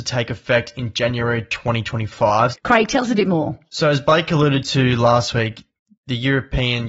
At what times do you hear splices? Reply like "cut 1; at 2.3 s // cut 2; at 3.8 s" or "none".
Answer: cut 1; at 2.5 s